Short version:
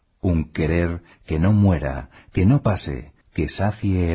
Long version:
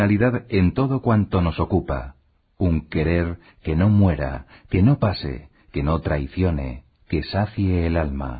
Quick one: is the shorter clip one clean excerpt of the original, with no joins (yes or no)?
no